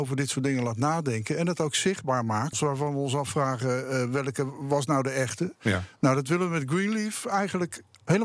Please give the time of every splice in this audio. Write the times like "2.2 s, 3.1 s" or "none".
2.5 s